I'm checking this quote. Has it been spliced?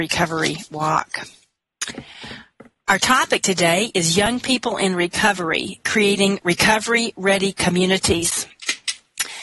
no; 0 cuts

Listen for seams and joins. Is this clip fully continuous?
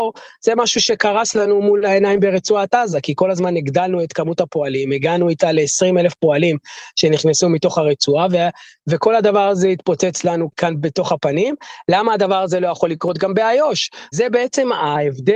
no; 1 cut; at 14.1 s

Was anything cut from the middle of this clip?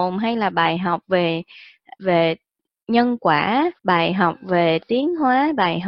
yes; 2 cuts; at 2.0 s, 3.8 s

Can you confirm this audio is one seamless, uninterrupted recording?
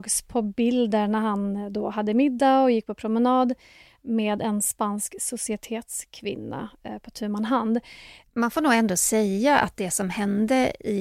no; 1 cut; at 8.2 s

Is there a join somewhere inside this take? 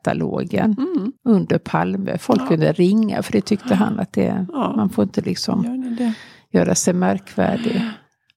yes; 1 cut; at 1.2 s

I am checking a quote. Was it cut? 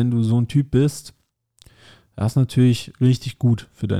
no; 0 cuts

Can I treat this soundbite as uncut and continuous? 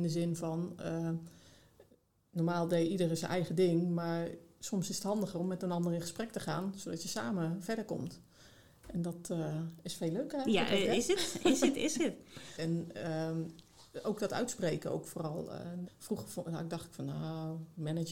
no; 2 cuts; at 12.6 s, 15.9 s

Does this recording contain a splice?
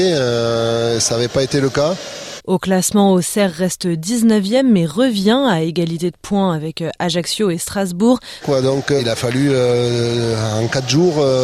yes; 2 cuts; at 2.4 s, 8.4 s

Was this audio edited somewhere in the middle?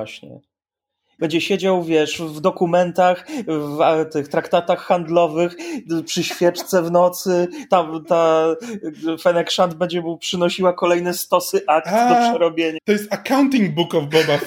yes; 2 cuts; at 1.2 s, 12.8 s

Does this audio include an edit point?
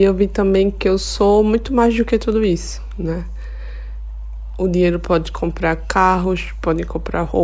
no; 0 cuts

